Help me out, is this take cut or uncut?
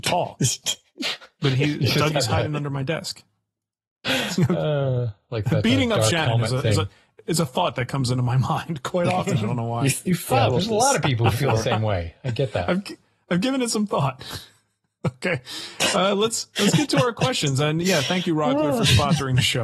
uncut